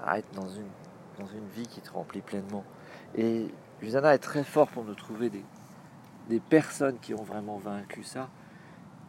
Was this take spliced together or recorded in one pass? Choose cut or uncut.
uncut